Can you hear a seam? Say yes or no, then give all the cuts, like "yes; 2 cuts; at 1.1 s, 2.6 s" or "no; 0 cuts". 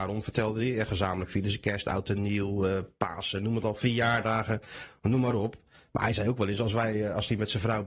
no; 0 cuts